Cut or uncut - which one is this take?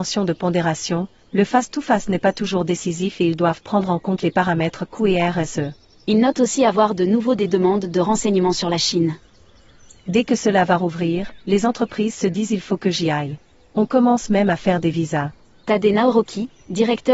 uncut